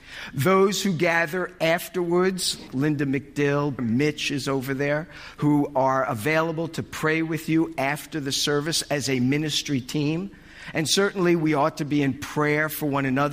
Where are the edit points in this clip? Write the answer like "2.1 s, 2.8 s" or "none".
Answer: 2.7 s, 3.8 s